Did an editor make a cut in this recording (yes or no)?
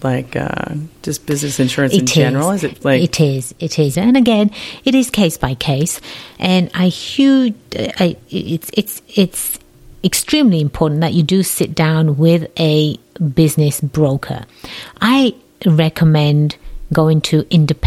yes